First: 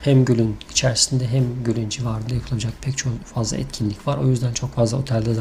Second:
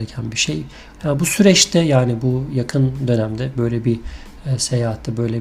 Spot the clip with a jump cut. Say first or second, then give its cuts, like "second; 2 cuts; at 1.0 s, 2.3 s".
second; 1 cut; at 1.0 s